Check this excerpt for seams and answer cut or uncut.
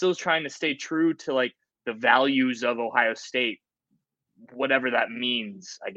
uncut